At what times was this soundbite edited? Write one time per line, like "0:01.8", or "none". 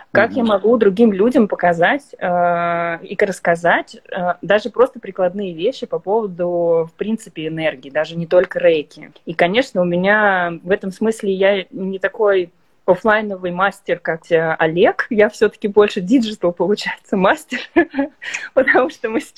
0:09.1
0:14.2